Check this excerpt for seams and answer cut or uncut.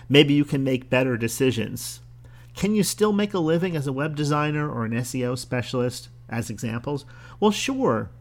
uncut